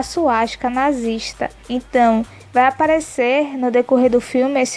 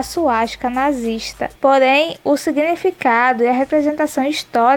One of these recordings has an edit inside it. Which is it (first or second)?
second